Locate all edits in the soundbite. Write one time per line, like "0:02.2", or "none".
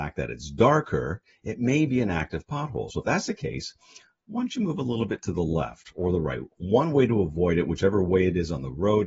none